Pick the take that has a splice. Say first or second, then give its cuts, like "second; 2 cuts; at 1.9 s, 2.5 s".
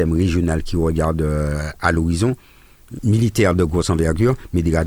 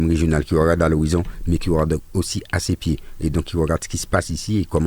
first; 1 cut; at 3.0 s